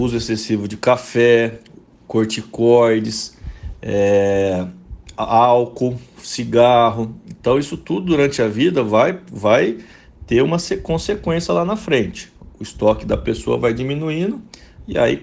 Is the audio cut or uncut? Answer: uncut